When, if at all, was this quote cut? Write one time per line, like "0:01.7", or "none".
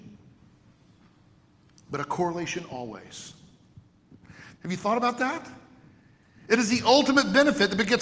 0:04.5